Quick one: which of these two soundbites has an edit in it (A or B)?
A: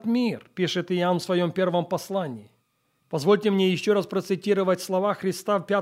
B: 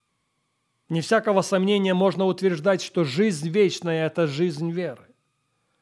A